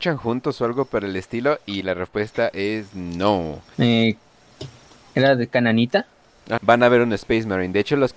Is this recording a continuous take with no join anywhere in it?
no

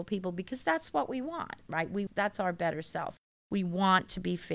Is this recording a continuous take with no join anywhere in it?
no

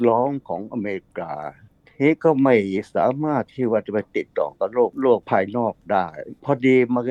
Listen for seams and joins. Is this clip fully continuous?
yes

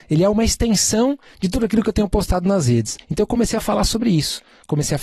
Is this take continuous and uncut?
no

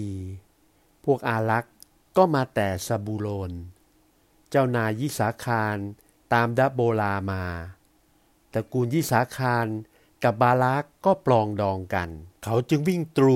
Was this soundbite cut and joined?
yes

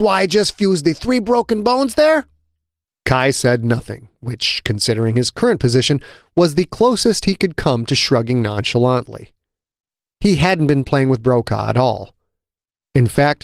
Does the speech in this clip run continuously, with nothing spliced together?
yes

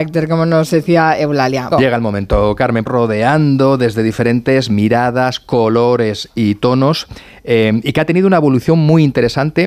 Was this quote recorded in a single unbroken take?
no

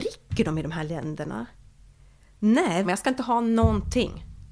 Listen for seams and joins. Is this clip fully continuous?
no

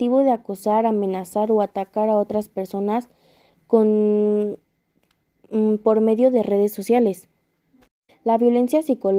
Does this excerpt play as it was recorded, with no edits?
no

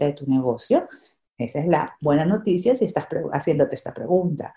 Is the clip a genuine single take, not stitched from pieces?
yes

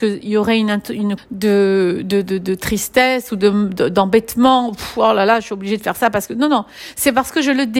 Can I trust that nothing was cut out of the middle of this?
no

